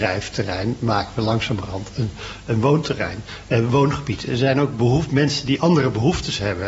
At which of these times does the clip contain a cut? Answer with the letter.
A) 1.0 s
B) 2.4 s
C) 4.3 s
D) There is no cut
C